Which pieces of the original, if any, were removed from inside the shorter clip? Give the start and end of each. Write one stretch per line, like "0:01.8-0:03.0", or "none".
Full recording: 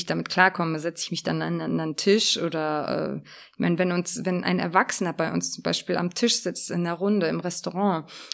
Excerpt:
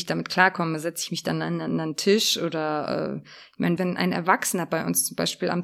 0:03.8-0:04.2